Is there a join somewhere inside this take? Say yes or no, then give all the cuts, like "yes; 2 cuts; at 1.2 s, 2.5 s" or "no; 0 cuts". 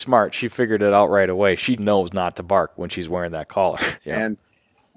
yes; 2 cuts; at 1.8 s, 4.0 s